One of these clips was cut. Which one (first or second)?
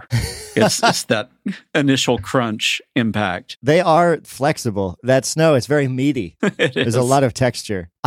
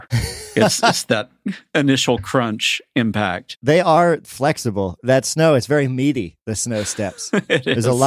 first